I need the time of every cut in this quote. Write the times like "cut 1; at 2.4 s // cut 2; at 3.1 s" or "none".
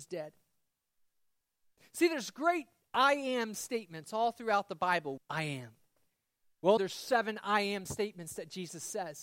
cut 1; at 5.2 s // cut 2; at 6.8 s